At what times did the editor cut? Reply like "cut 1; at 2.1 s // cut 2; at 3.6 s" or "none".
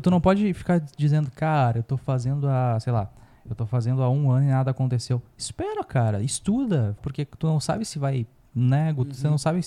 cut 1; at 7.0 s